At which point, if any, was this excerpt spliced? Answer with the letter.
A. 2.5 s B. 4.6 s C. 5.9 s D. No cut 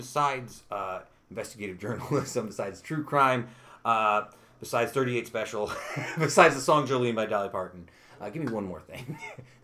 D